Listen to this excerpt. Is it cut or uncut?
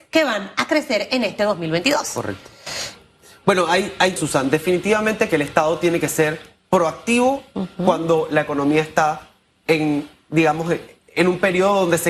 cut